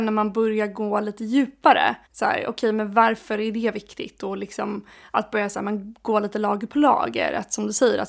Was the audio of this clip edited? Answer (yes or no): yes